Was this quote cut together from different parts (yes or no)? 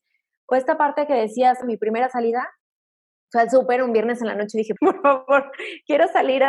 yes